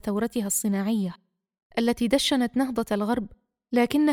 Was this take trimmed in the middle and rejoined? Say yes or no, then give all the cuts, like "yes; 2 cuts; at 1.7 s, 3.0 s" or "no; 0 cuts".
no; 0 cuts